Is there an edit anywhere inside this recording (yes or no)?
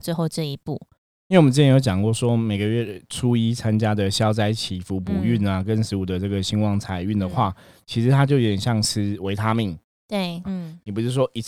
yes